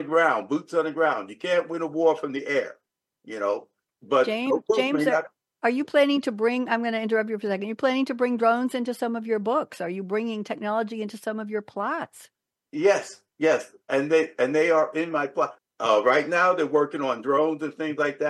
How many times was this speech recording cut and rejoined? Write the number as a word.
two